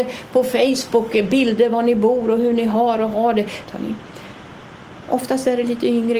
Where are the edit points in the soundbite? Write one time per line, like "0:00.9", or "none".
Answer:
0:03.7
0:05.0